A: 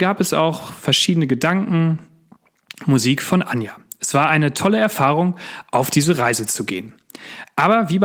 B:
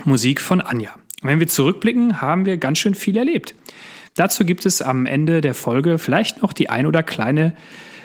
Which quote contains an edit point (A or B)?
B